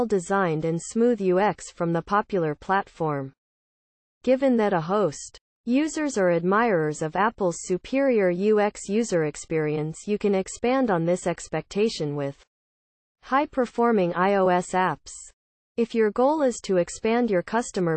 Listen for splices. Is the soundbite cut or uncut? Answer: uncut